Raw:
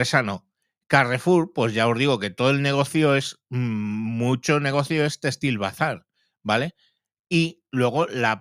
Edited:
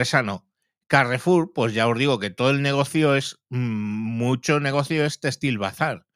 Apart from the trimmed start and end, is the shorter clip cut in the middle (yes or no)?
no